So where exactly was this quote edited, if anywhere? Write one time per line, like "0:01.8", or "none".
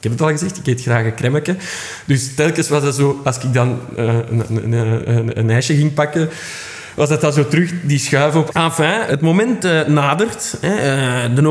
0:08.5